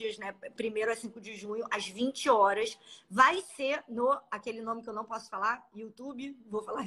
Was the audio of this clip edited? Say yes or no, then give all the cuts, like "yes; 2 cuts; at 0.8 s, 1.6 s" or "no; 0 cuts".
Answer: no; 0 cuts